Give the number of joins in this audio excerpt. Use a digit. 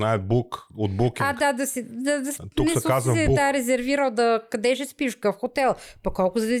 0